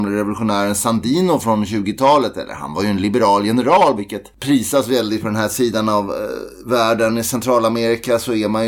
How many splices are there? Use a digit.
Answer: 1